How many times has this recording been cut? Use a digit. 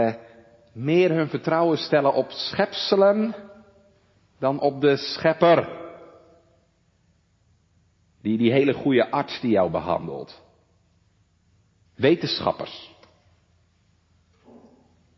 1